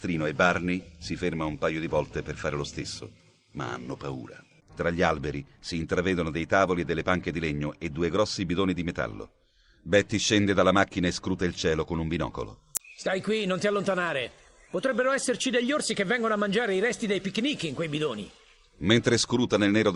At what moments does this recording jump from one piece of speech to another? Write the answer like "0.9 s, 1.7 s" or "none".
4.6 s